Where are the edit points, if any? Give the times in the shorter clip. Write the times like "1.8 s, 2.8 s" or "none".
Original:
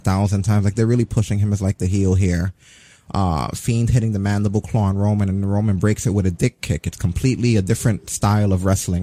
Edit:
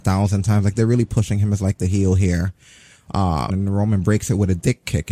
3.5 s